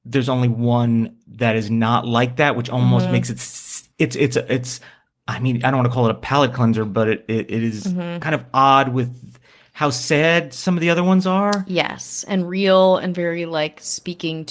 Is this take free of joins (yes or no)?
yes